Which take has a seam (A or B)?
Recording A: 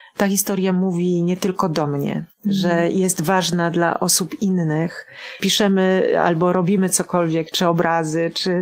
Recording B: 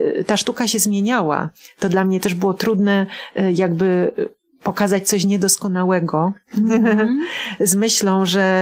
A